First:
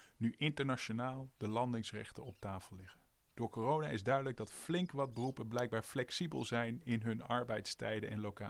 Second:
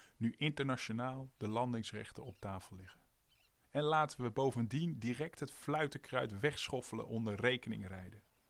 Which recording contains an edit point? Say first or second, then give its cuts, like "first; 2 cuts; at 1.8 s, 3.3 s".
first; 1 cut; at 3.3 s